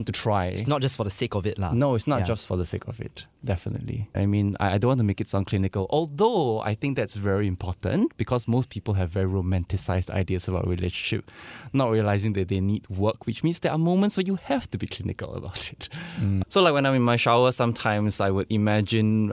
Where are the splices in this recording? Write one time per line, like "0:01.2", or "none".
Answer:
0:04.1
0:16.4